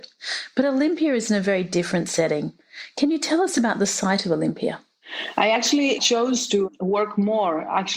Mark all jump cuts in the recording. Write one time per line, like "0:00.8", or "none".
none

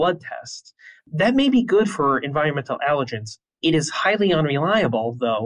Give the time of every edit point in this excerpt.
none

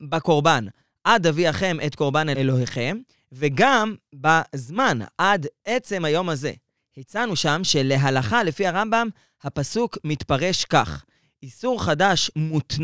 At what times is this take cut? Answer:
none

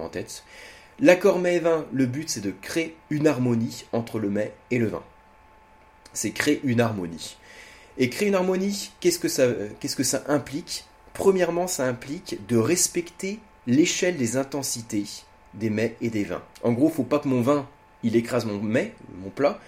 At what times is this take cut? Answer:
0:16.5

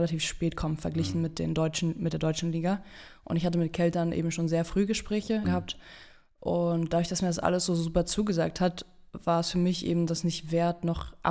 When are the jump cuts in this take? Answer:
0:05.4

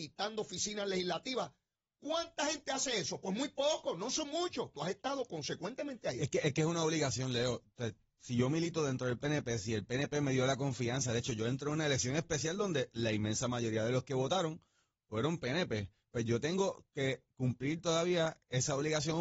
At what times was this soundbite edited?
0:04.7

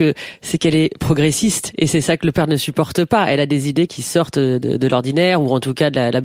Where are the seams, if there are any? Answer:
0:03.9

